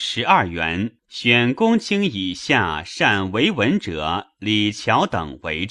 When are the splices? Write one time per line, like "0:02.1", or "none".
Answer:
0:01.0